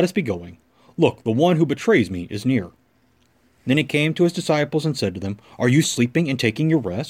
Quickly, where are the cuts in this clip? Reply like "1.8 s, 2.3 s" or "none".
3.6 s, 5.8 s